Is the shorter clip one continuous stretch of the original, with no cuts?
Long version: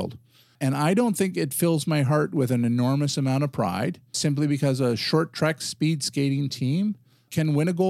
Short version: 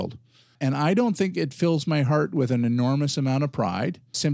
yes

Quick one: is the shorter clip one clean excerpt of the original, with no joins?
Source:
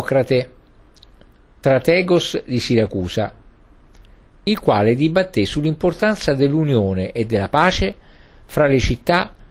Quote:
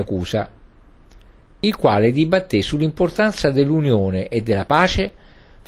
yes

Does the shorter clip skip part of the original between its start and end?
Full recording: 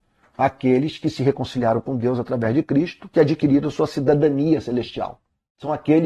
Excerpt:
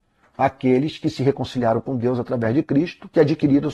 no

